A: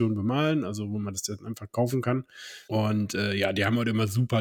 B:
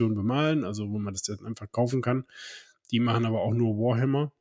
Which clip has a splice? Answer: A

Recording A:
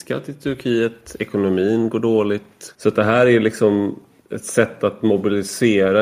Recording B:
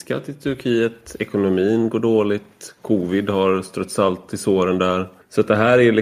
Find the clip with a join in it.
A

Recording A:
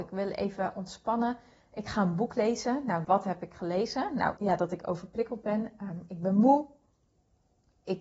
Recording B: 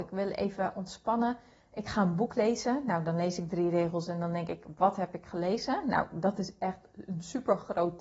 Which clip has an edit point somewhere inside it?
A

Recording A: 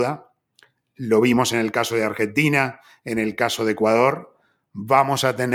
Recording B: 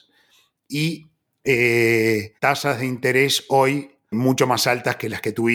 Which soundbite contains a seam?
B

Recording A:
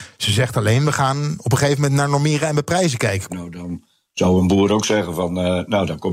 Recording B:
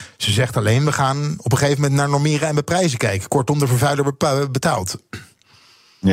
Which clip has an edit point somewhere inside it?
A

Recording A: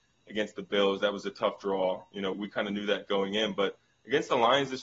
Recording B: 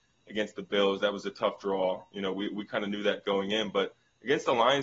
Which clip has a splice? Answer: A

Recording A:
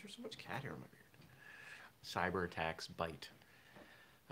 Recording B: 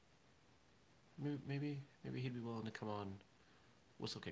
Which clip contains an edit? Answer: A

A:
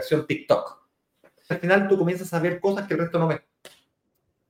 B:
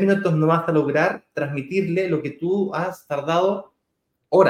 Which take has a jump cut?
A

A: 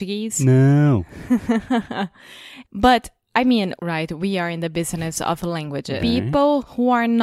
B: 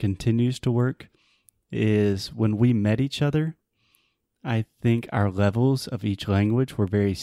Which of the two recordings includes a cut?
A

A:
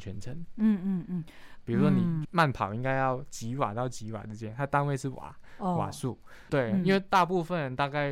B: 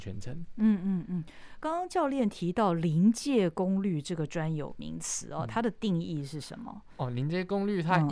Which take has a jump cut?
A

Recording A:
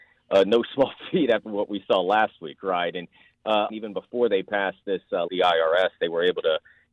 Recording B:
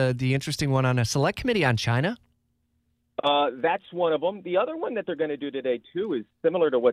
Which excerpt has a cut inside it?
A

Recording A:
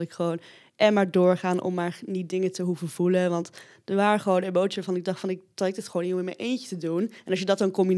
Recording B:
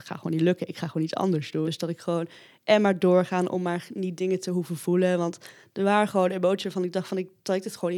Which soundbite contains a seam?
B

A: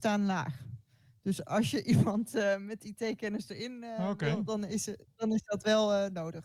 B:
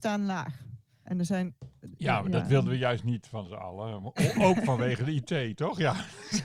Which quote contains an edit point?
B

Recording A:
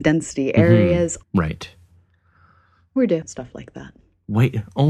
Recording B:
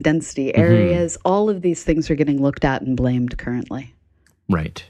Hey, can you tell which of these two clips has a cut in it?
A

